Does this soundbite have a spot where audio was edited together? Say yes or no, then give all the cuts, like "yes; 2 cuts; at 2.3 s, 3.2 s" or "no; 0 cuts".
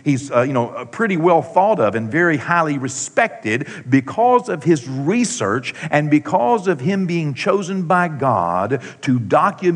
no; 0 cuts